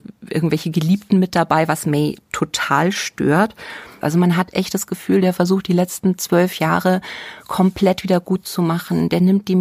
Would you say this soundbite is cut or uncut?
cut